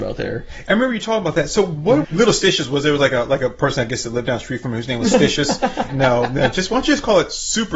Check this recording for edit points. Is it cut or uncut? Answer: cut